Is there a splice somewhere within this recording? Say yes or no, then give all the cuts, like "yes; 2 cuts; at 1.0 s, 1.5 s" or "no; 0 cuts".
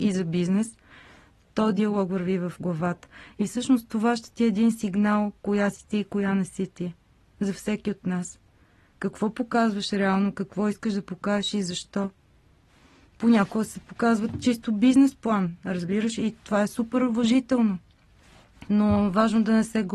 yes; 1 cut; at 18.7 s